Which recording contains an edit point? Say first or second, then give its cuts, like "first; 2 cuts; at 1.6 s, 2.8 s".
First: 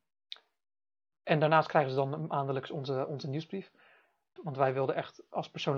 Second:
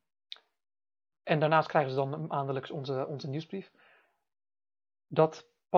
first; 1 cut; at 4.4 s